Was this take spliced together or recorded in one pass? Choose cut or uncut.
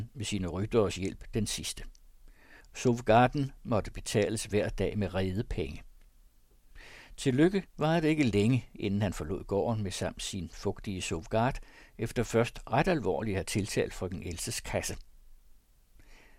cut